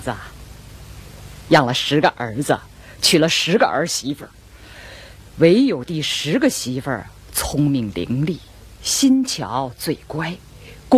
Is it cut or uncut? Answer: uncut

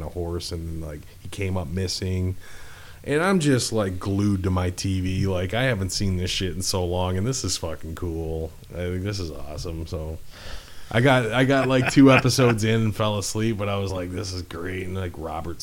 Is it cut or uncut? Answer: uncut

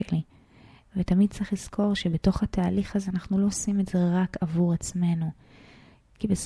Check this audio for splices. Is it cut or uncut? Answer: uncut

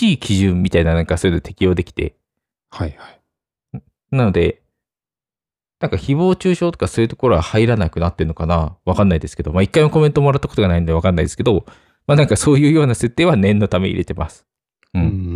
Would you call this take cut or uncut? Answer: uncut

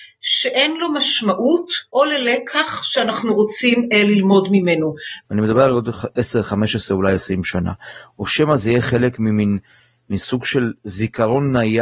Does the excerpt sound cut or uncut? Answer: cut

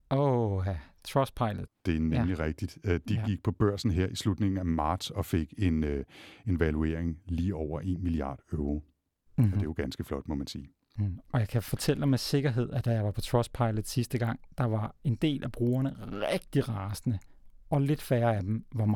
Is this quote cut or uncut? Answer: cut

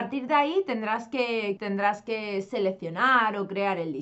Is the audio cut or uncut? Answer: cut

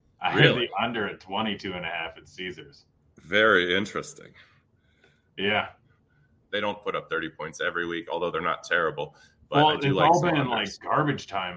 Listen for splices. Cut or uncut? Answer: cut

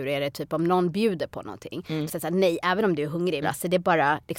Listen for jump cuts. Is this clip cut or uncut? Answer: cut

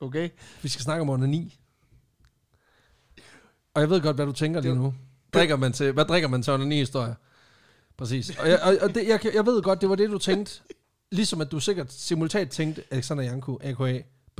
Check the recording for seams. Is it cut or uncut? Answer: cut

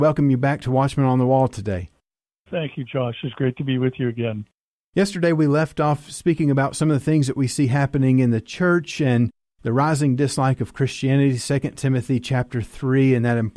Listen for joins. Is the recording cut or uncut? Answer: uncut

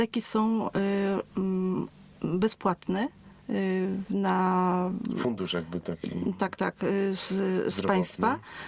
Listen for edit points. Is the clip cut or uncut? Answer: uncut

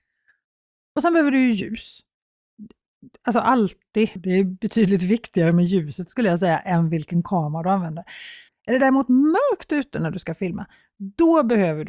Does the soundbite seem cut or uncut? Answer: cut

